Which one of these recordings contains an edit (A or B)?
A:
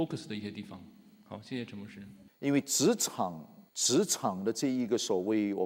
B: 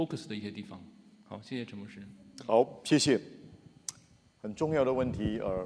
A